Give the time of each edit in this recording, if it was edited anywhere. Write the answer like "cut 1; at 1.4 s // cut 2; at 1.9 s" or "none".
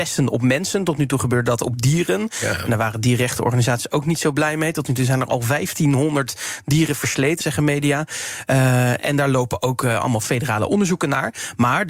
cut 1; at 7.4 s